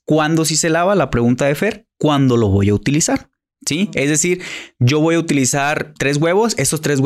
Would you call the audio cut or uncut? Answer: cut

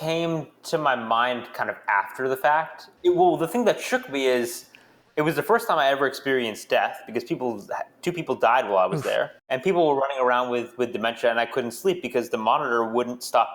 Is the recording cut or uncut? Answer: cut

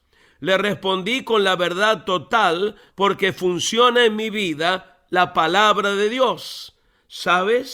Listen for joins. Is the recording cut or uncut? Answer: cut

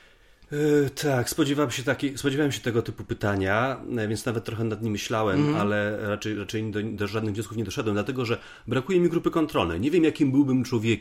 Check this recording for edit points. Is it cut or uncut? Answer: uncut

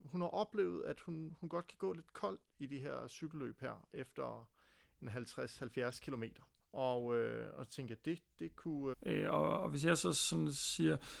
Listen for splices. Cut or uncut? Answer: cut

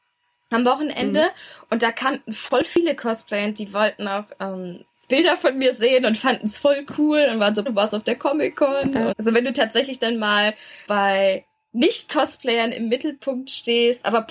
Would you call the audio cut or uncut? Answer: cut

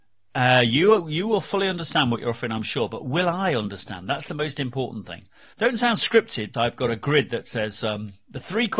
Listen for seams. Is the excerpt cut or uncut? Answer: cut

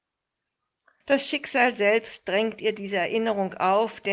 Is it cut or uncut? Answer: cut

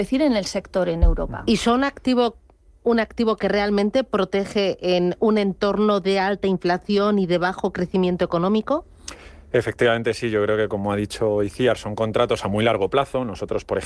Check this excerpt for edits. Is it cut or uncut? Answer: uncut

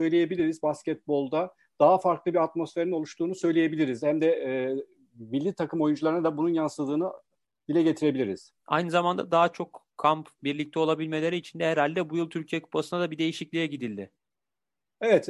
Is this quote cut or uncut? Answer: cut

